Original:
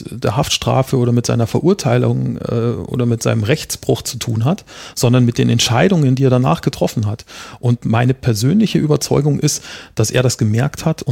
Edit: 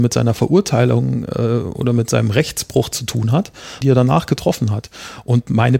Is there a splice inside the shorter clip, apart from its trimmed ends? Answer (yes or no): yes